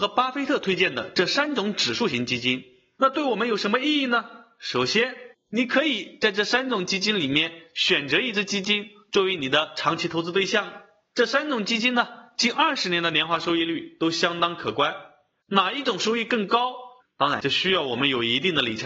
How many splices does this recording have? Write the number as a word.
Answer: three